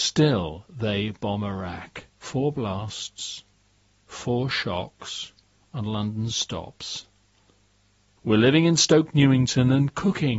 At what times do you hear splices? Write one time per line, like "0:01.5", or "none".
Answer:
0:02.1
0:08.2